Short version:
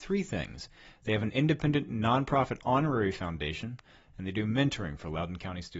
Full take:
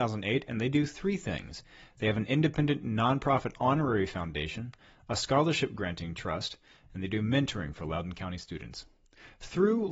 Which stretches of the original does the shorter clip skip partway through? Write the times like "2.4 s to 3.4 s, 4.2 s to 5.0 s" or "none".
4.9 s to 6.8 s